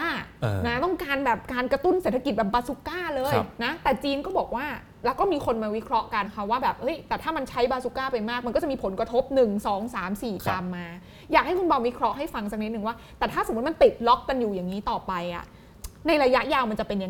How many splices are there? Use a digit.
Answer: 1